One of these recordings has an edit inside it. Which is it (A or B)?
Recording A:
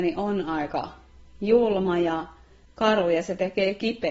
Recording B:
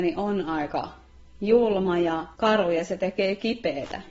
B